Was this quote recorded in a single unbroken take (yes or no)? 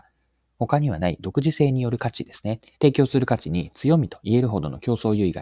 no